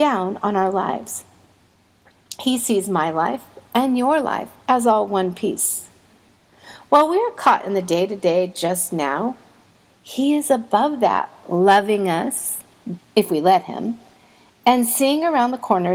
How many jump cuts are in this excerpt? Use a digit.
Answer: 1